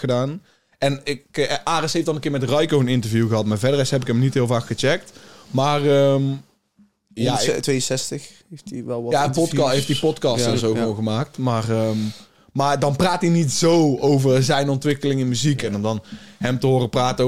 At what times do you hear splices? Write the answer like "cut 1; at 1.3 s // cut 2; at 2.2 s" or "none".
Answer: none